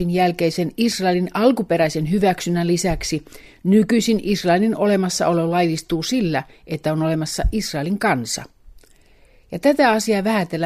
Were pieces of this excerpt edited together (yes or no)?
no